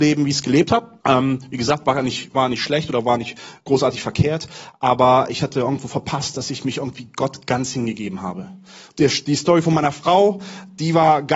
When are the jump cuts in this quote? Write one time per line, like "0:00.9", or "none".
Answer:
0:01.0
0:08.9

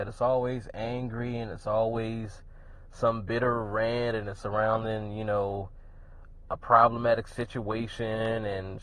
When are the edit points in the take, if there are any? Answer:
0:04.4

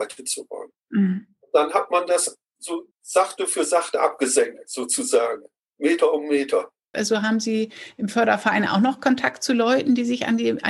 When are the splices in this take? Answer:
0:02.9
0:06.9

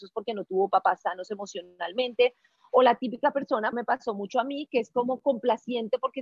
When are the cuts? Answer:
0:03.7

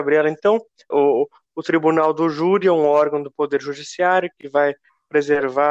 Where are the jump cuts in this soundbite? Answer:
0:00.9

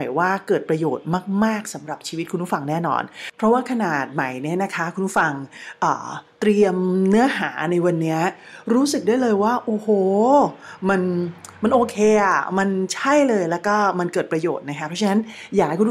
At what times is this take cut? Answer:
0:03.3

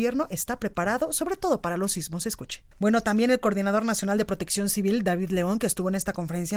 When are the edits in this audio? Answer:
0:02.7

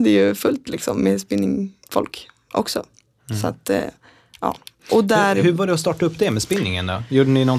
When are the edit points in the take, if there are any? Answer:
none

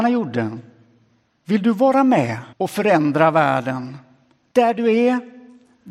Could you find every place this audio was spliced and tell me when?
0:01.4
0:02.5

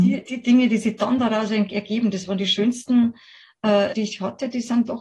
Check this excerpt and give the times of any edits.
0:03.9

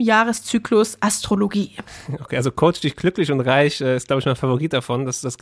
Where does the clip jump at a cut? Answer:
none

